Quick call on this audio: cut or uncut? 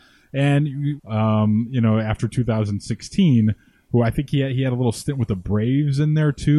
cut